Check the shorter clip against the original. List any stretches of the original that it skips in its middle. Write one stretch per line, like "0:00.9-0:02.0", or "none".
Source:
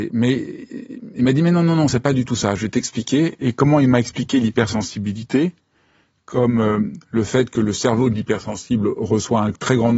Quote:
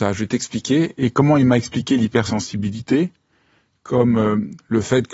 none

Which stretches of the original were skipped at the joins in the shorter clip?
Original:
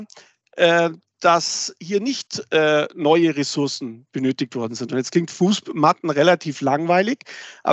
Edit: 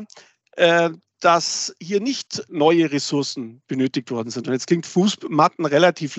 0:02.5-0:02.9

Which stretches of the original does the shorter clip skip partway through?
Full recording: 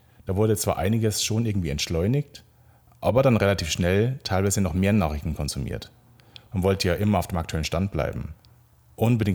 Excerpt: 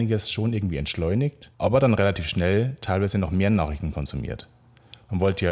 0:02.5-0:03.0

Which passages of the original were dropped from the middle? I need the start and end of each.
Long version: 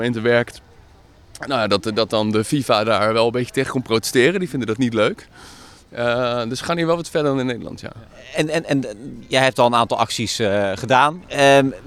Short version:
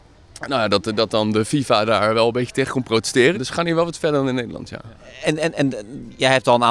0:04.3-0:06.4

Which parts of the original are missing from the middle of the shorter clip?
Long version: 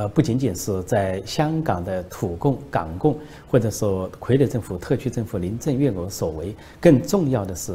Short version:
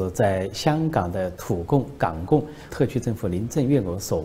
0:03.4-0:04.8

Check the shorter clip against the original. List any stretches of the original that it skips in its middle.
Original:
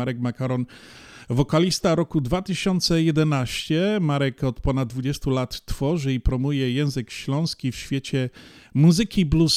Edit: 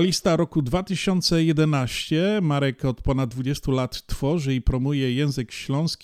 none

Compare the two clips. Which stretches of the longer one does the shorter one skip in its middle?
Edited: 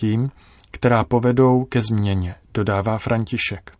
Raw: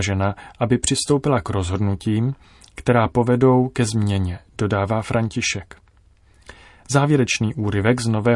none

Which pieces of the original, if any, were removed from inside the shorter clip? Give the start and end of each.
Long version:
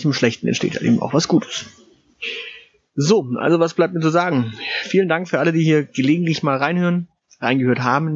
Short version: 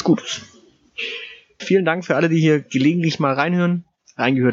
0:02.8-0:04.8

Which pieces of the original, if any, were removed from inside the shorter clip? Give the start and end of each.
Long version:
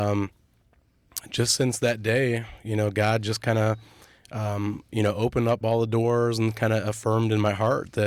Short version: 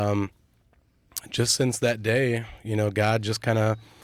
none

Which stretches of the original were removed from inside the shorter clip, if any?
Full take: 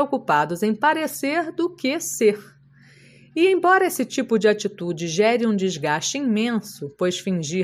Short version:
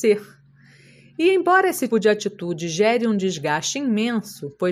0:04.1-0:04.3

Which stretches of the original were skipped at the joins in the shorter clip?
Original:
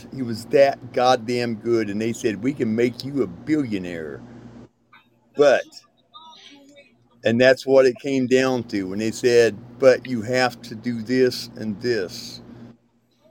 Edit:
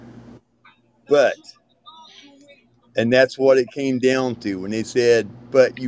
none

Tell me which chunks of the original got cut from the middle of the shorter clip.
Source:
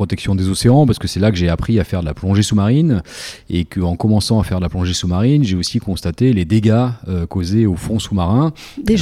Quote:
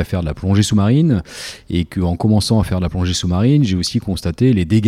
none

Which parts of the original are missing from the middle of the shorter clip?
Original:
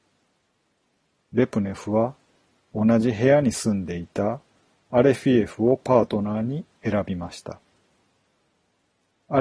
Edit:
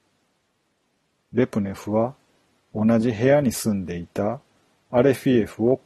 none

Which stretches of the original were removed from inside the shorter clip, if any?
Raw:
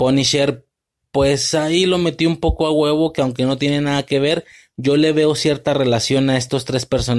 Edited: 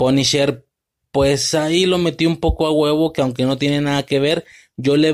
none

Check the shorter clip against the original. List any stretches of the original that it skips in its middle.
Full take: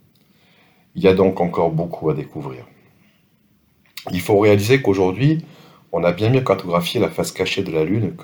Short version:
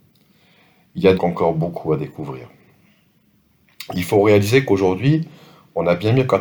0:01.2-0:01.3

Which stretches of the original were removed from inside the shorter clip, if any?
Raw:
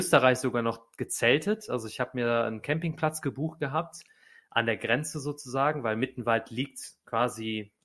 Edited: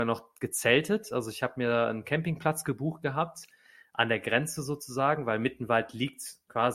none

